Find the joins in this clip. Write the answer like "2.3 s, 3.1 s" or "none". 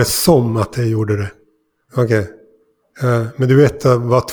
1.9 s